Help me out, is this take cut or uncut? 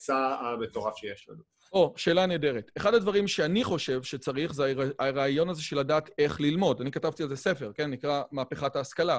uncut